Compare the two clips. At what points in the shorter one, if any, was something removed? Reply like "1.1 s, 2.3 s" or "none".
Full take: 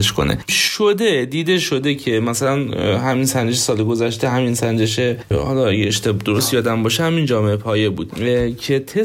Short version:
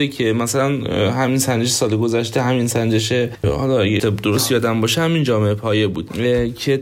4.0 s

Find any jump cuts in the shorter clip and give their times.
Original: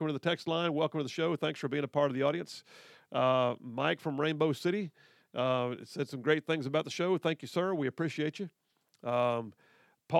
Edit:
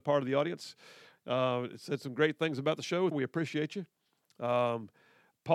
1.1 s, 3.1 s

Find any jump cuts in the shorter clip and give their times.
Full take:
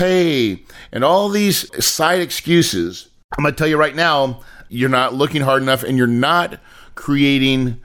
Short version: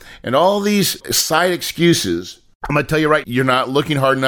3.2 s

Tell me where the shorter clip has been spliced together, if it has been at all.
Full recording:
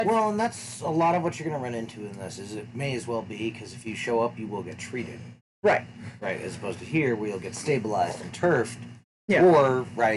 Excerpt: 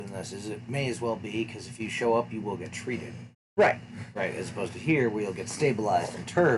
none

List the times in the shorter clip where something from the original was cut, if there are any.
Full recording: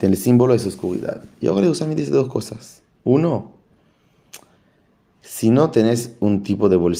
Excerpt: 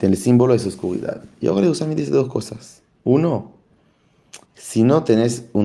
4.4 s

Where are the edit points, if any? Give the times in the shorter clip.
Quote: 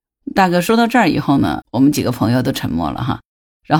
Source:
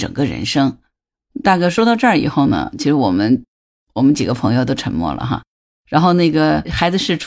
1.6 s

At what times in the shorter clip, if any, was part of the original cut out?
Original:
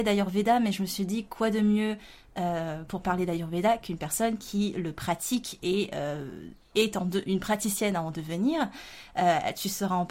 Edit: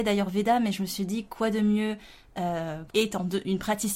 2.9 s

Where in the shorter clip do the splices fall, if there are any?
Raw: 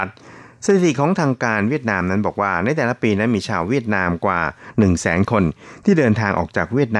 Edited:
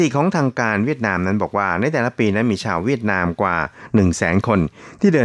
none

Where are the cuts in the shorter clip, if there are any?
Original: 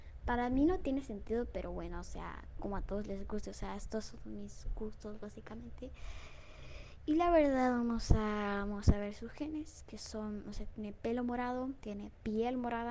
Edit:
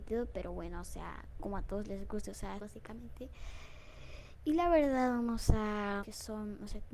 2.6 s, 6.0 s

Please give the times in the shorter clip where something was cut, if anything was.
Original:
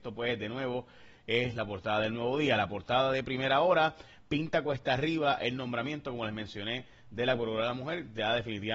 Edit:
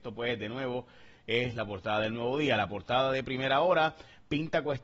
none

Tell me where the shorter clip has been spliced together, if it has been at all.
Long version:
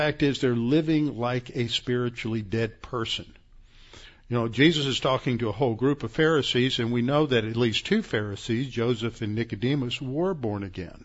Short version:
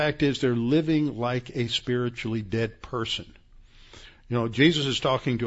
none

